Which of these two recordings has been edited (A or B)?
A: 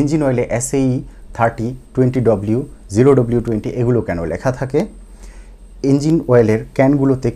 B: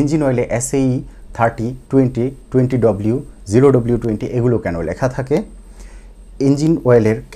A